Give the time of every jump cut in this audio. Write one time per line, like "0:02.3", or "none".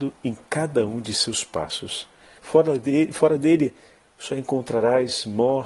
0:02.4